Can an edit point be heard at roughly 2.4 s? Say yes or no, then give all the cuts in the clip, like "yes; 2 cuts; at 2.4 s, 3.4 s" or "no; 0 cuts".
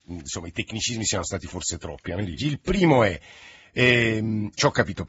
yes; 1 cut; at 2.4 s